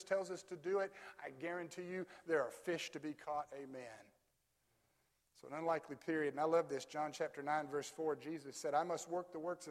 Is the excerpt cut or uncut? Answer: uncut